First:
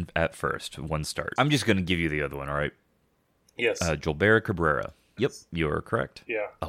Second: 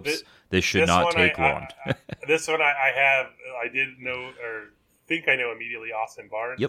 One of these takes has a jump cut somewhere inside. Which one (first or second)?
first